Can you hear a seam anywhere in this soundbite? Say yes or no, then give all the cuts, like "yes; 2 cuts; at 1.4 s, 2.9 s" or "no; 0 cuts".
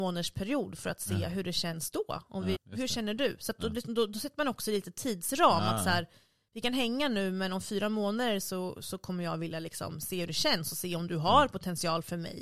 yes; 1 cut; at 2.5 s